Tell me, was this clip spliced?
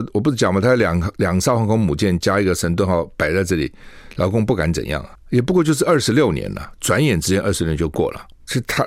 no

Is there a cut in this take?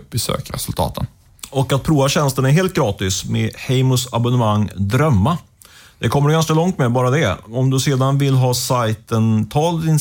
no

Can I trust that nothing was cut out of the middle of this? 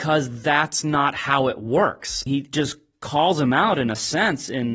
no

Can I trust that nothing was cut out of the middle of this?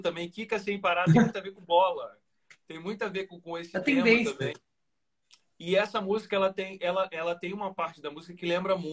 yes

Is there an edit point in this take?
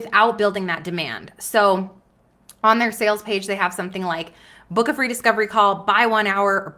no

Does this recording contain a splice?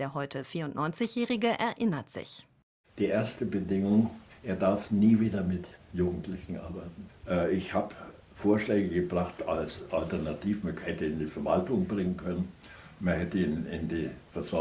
no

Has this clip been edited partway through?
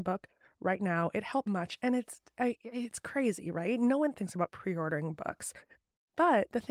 yes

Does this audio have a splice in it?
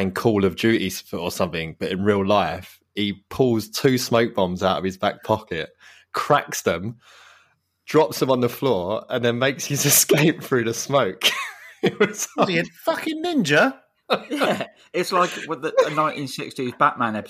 no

